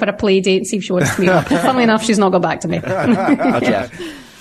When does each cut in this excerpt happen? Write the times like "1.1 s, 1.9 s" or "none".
none